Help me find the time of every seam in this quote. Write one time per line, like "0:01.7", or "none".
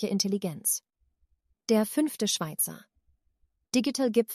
none

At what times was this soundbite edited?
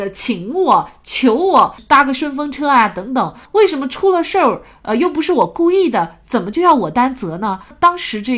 none

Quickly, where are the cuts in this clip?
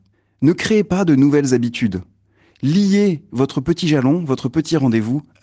none

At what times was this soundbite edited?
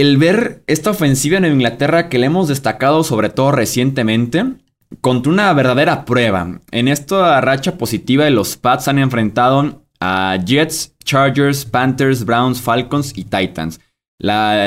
none

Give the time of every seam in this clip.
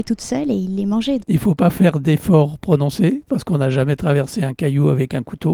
0:01.2

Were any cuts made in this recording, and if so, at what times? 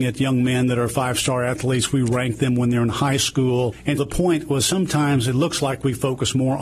0:04.0

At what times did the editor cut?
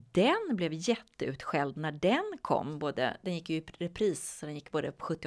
none

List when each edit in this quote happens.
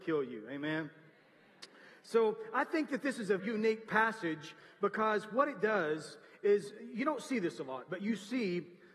0:03.4

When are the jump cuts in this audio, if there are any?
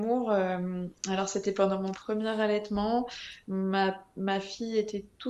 none

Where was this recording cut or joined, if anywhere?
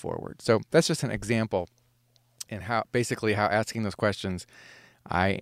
0:02.5

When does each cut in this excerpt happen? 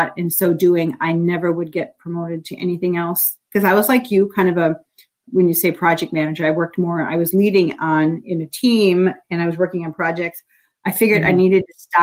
none

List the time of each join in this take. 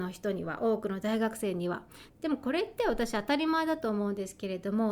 0:02.1

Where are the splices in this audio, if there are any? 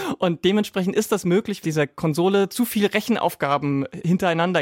0:01.6

